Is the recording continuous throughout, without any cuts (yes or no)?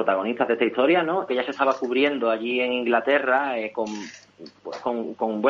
no